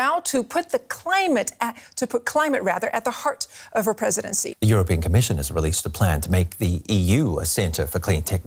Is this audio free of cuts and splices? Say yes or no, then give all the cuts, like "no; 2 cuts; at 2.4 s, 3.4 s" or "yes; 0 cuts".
no; 1 cut; at 4.5 s